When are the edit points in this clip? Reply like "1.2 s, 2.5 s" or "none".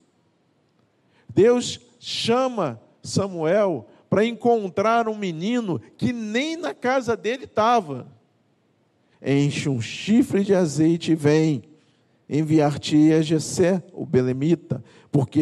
9.1 s